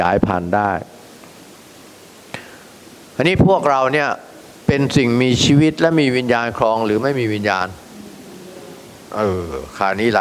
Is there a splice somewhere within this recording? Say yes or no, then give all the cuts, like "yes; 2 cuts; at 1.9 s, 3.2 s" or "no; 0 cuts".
no; 0 cuts